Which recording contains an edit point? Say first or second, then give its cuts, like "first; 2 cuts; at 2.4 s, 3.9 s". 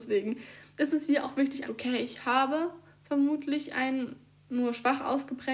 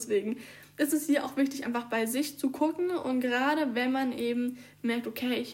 first; 1 cut; at 1.6 s